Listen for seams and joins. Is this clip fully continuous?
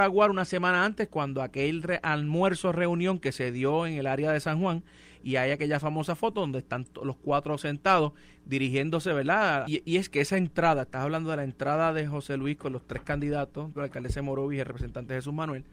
no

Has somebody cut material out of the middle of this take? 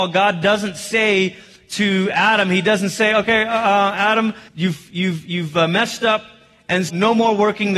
yes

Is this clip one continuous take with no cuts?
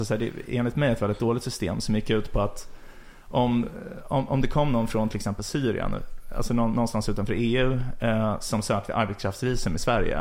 yes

